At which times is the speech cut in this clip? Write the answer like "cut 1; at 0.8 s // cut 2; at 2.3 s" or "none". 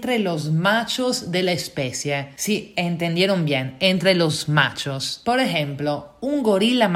none

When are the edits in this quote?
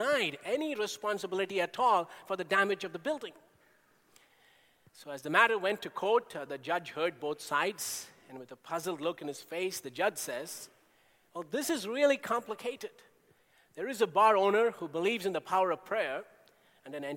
none

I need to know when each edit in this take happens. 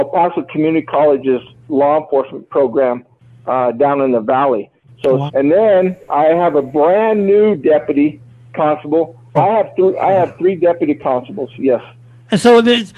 cut 1; at 5.3 s // cut 2; at 9.4 s

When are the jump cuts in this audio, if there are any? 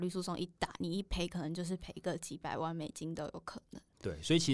none

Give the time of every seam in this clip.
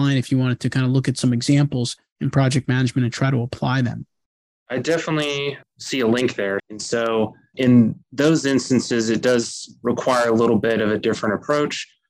cut 1; at 4.6 s // cut 2; at 6.6 s

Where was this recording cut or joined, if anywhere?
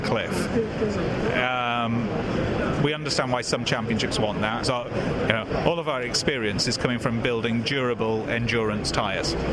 cut 1; at 4.6 s

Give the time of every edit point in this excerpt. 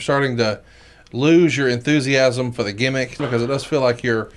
cut 1; at 3.2 s

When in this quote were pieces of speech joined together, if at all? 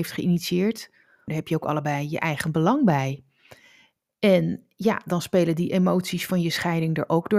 cut 1; at 1.3 s

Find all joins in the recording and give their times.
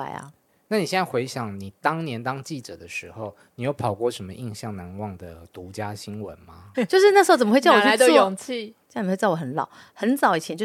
cut 1; at 6.7 s // cut 2; at 8.8 s

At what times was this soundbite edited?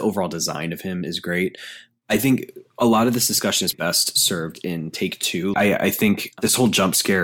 cut 1; at 3.7 s // cut 2; at 5.5 s

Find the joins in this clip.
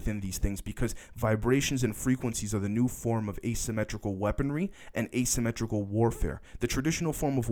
none

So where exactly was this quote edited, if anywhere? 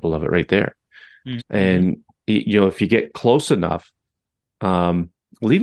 cut 1; at 1.4 s

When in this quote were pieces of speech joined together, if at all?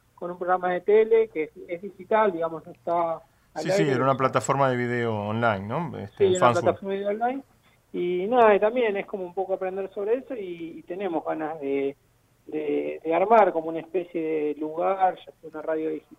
none

